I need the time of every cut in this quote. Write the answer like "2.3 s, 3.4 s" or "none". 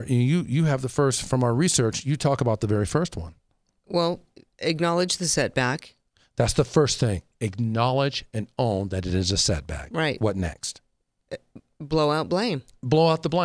none